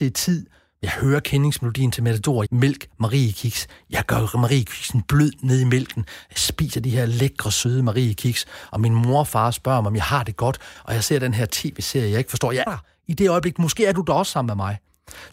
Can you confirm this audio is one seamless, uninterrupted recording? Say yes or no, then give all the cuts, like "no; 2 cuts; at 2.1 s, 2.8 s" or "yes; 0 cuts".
no; 2 cuts; at 2.5 s, 12.7 s